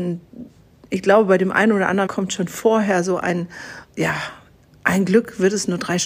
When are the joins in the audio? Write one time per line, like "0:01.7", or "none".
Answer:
0:02.1
0:03.9